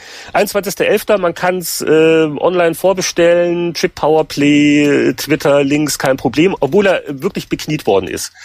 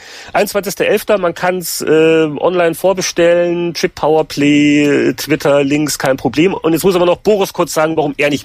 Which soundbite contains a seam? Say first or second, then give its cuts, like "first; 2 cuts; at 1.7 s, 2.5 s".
first; 1 cut; at 6.6 s